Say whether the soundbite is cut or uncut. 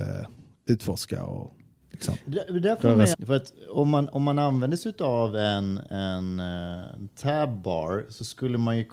cut